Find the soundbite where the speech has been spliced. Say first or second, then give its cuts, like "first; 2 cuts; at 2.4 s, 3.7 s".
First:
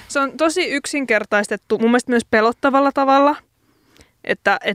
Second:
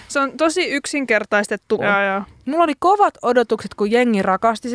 second; 1 cut; at 1.8 s